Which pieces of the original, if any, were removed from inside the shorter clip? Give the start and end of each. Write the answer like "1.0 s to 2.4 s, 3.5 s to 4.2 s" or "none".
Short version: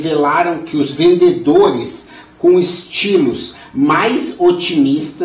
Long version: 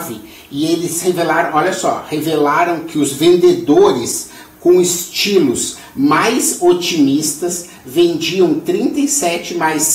none

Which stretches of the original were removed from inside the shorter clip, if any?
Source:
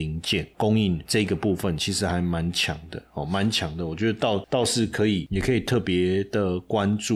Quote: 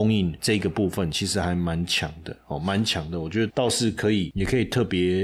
4.2 s to 4.4 s

